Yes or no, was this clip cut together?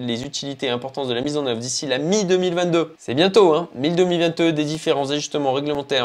yes